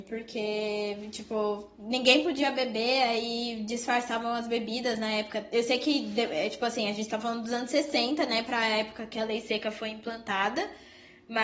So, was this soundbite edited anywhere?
no; 0 cuts

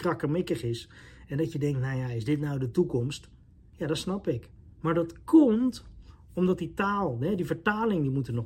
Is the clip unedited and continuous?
yes; 0 cuts

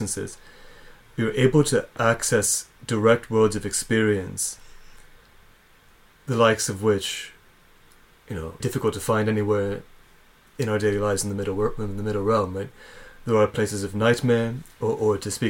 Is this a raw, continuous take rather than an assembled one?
no; 2 cuts; at 6.1 s, 8.6 s

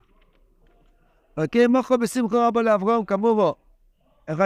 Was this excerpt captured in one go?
yes; 0 cuts

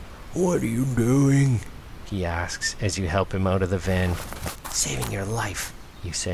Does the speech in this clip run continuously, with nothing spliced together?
yes; 0 cuts

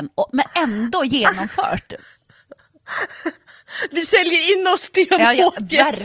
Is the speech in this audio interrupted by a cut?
no; 0 cuts

